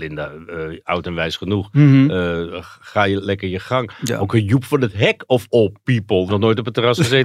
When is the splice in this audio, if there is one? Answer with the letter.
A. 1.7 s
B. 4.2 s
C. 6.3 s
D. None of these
C